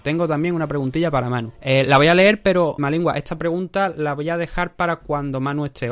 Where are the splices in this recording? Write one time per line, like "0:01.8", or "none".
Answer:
0:01.5
0:02.8

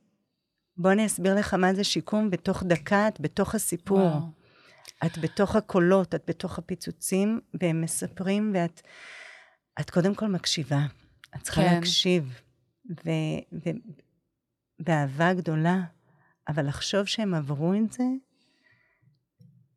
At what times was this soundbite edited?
none

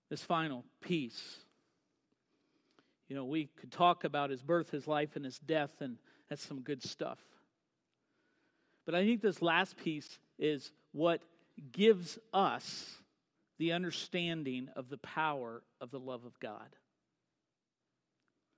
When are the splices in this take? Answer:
none

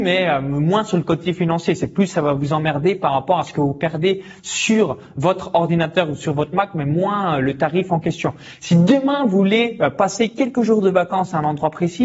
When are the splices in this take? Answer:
none

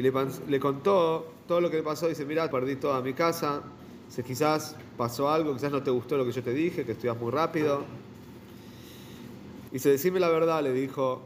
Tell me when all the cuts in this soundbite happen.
0:02.5
0:09.7

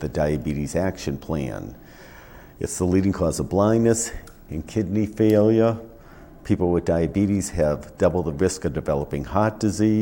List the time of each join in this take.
0:04.5

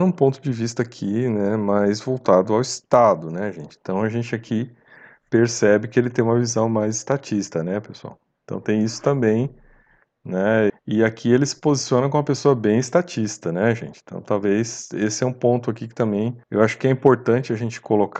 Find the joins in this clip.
0:10.7
0:16.4

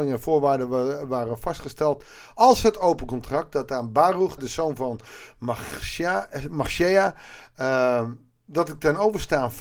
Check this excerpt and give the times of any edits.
0:04.4

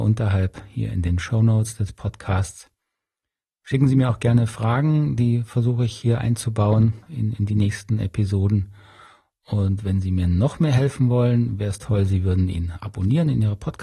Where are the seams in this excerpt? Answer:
0:07.0

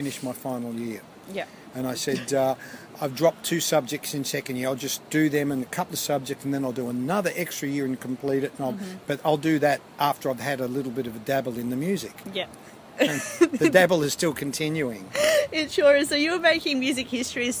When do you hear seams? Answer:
none

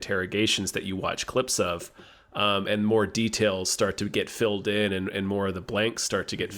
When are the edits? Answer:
none

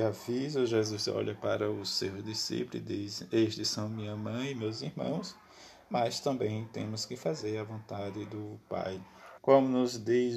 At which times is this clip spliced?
0:09.4

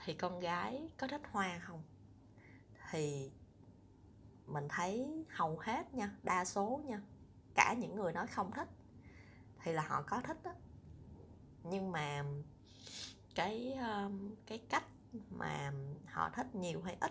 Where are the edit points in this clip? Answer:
none

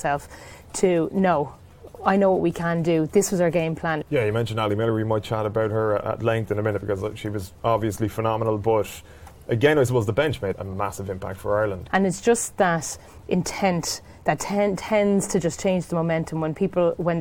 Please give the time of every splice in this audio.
0:04.0
0:10.5
0:11.9

